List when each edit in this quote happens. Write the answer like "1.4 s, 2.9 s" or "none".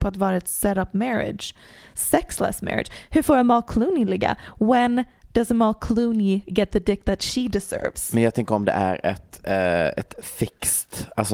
none